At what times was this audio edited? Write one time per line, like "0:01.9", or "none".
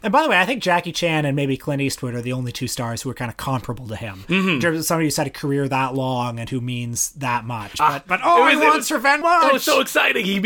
0:07.7
0:09.2